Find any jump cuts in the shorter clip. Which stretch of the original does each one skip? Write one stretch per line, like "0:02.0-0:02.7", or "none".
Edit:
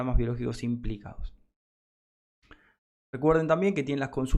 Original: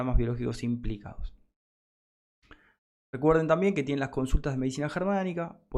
none